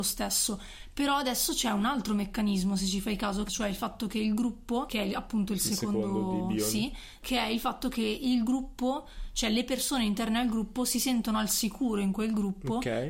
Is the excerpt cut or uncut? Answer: cut